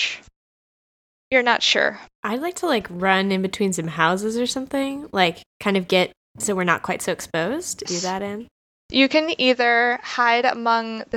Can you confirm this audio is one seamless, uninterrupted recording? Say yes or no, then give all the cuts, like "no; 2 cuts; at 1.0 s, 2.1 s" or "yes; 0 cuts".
no; 2 cuts; at 2.1 s, 7.9 s